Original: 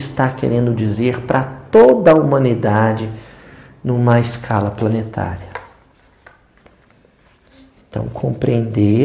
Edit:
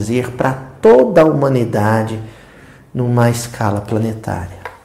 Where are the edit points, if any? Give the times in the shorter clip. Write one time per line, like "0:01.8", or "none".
none